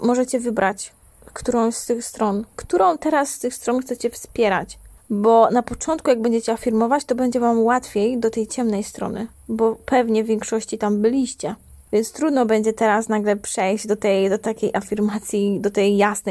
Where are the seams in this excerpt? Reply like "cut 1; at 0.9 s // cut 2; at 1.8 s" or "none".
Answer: cut 1; at 2.5 s